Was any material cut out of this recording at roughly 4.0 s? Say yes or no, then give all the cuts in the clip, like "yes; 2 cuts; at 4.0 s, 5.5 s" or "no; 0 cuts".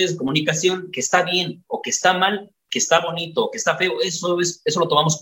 no; 0 cuts